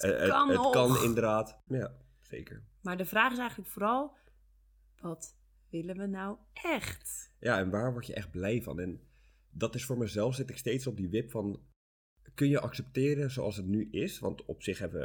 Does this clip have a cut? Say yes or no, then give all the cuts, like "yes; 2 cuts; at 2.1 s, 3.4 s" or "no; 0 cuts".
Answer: yes; 1 cut; at 1.7 s